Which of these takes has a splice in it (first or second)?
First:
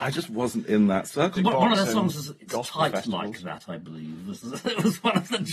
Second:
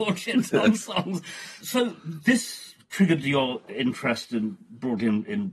first